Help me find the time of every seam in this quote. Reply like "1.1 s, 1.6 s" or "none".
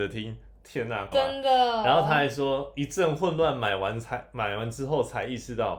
1.1 s